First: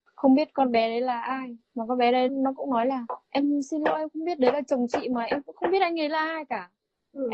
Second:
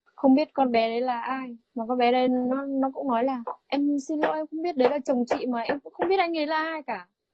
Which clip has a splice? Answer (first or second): first